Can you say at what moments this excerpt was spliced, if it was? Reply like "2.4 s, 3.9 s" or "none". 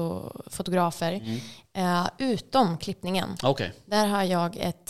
1.6 s